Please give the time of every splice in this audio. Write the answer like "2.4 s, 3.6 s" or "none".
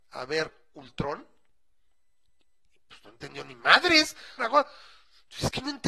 4.4 s